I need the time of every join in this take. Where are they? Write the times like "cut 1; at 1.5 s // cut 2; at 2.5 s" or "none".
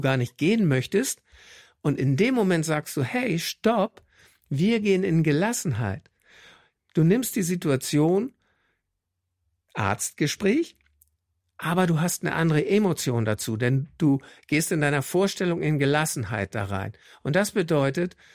none